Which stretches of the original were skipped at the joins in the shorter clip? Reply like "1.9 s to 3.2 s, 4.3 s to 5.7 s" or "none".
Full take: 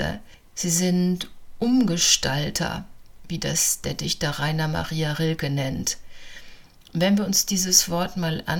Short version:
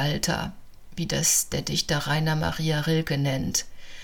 none